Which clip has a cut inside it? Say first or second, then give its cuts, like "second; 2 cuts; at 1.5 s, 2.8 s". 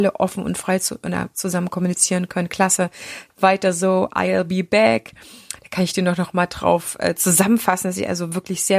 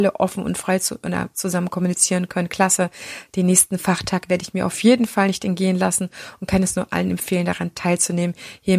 first; 2 cuts; at 3.3 s, 5.6 s